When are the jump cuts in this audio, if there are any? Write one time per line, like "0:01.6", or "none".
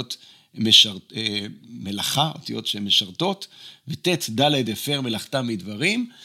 none